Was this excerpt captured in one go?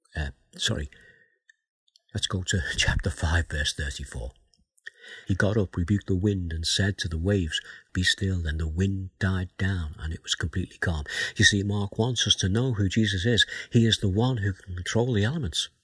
no; 2 cuts; at 5.2 s, 7.9 s

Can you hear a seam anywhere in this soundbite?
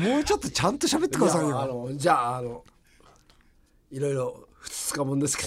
no; 0 cuts

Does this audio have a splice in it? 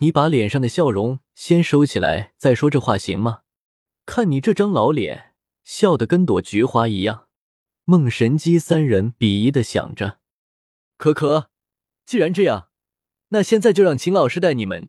no; 0 cuts

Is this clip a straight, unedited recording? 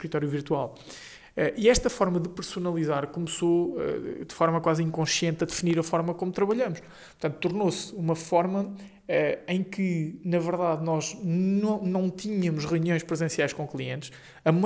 yes; 0 cuts

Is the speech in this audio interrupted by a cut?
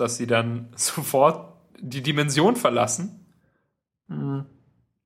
yes; 1 cut; at 4.1 s

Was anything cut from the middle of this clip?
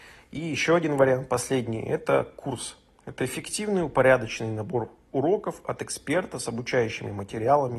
no; 0 cuts

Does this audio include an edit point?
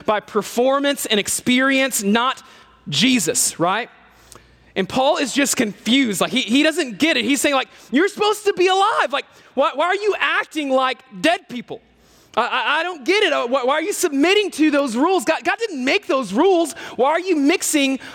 no; 0 cuts

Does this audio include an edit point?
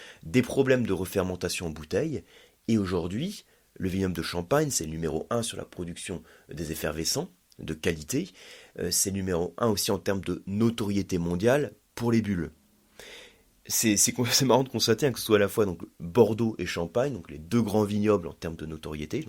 no; 0 cuts

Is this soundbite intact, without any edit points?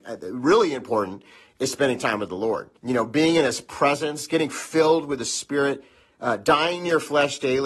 no; 1 cut; at 2.8 s

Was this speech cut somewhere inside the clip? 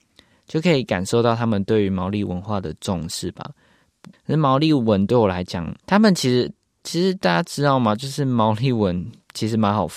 yes; 2 cuts; at 4.1 s, 5.8 s

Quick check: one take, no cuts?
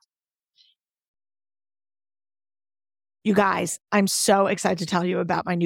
yes; 0 cuts

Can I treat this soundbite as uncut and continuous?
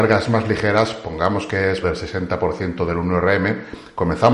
no; 1 cut; at 1.8 s

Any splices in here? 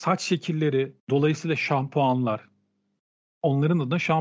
yes; 1 cut; at 1.0 s

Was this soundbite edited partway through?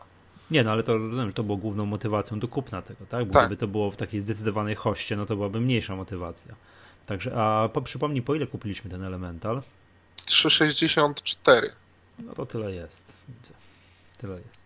no; 0 cuts

